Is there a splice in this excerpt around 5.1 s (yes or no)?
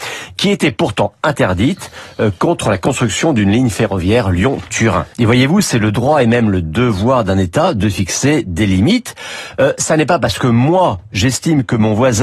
yes